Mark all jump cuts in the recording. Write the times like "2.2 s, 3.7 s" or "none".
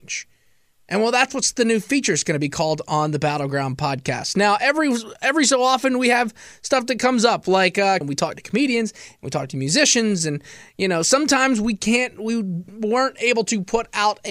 8.0 s